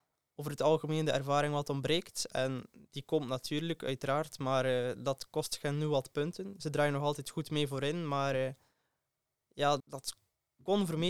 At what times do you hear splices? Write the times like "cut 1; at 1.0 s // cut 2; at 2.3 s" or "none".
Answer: cut 1; at 9.8 s